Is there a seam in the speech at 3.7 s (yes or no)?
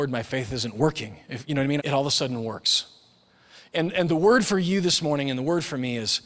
no